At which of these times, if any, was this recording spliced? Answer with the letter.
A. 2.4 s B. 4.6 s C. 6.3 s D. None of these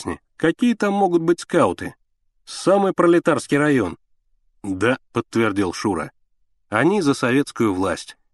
D